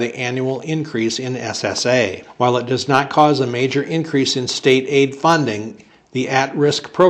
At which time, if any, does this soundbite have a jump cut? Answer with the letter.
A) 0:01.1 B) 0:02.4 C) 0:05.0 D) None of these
D